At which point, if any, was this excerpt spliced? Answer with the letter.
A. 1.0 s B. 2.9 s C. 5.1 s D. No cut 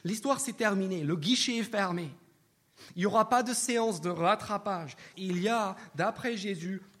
C